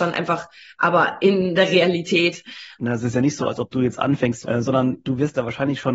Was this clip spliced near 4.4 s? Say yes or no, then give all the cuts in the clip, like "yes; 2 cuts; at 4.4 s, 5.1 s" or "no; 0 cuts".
yes; 2 cuts; at 2.8 s, 4.4 s